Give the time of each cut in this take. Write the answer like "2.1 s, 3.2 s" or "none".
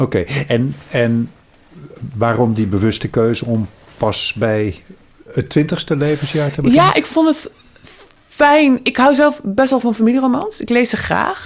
none

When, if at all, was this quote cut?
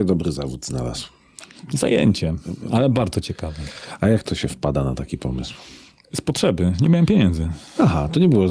none

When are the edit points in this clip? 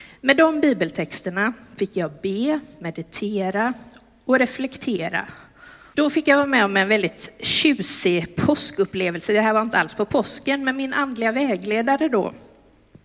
5.9 s

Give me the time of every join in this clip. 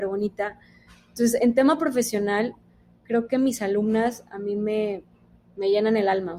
none

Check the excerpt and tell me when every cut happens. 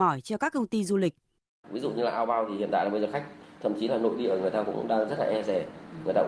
1.6 s

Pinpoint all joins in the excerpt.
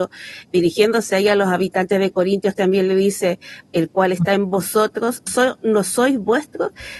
3.6 s, 5.3 s

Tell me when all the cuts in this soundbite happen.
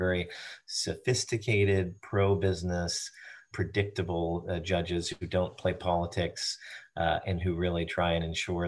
3.5 s

